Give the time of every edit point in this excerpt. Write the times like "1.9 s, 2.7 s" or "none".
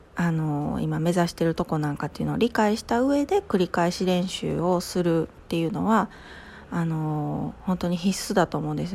none